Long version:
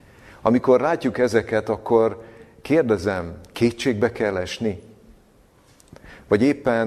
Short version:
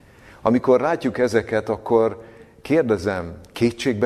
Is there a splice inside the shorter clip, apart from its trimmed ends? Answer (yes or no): no